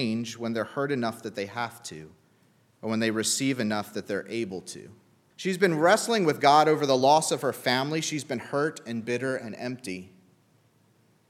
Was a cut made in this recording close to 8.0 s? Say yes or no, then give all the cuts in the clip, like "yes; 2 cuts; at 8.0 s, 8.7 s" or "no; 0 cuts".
no; 2 cuts; at 2.7 s, 5.3 s